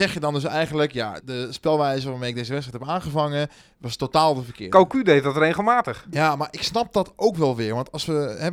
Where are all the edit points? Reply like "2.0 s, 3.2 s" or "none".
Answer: 1.2 s, 6.1 s